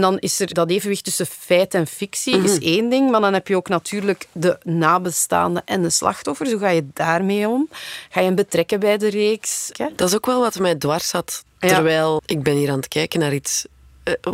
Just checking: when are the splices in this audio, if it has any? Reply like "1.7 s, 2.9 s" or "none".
9.7 s, 12.2 s